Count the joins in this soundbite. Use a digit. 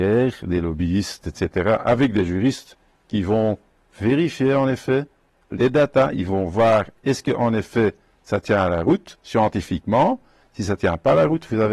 1